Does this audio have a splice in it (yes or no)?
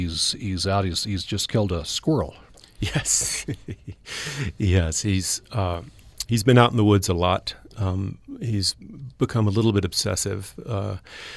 no